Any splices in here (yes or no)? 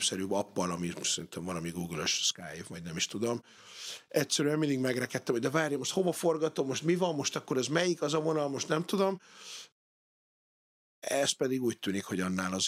no